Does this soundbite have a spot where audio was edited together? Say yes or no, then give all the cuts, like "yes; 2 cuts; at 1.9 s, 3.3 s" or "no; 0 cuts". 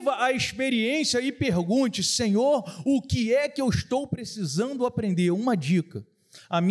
no; 0 cuts